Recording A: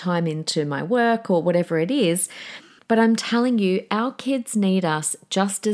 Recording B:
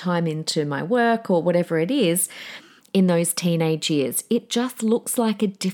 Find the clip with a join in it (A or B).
B